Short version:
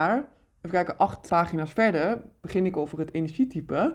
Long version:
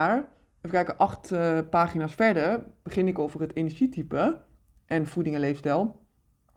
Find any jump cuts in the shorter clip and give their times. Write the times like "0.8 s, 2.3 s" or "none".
1.3 s